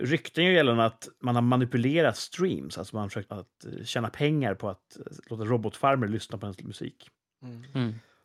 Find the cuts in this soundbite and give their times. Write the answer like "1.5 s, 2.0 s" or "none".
3.3 s